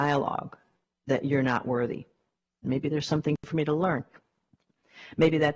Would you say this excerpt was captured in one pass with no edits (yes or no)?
no